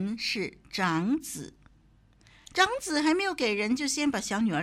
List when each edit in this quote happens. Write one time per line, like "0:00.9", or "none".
none